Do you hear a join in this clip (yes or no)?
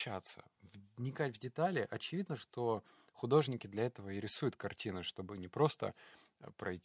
no